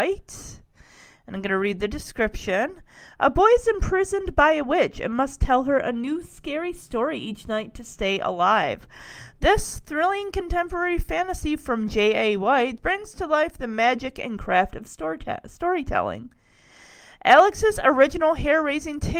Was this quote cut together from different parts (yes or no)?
yes